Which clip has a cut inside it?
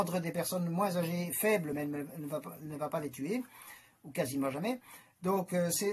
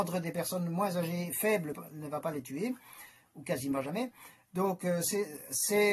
second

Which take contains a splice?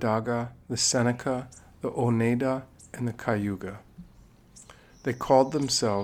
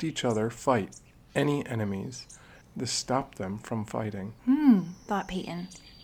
second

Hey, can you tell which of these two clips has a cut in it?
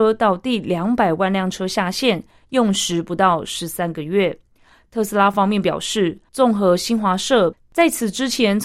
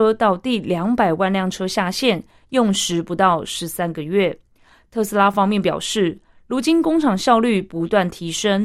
first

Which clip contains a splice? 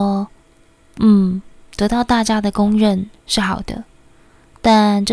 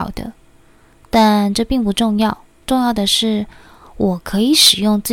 second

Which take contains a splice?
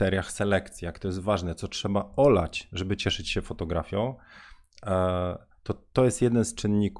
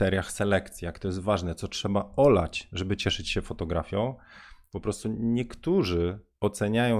second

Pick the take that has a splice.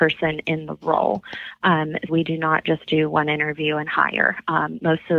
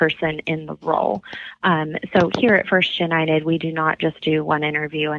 first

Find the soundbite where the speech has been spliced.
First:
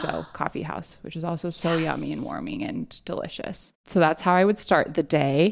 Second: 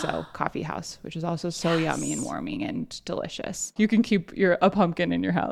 second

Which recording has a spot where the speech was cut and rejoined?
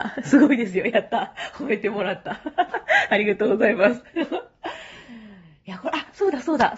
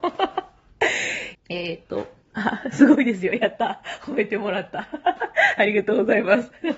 second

